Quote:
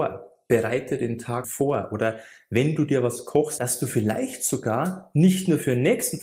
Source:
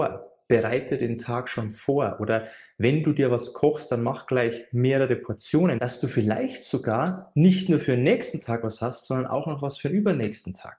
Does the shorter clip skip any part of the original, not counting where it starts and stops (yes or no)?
yes